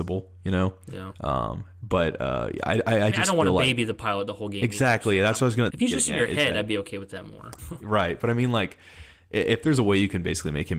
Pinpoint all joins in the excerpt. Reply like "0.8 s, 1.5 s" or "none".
5.7 s, 7.6 s